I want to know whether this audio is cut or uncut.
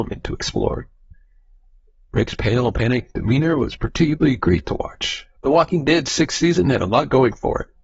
cut